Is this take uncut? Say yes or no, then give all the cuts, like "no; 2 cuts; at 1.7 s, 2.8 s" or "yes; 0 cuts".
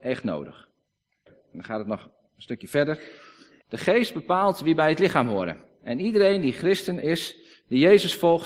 no; 2 cuts; at 1.3 s, 3.6 s